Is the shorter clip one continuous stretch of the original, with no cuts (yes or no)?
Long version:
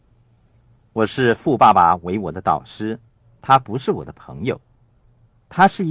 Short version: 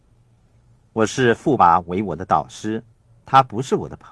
no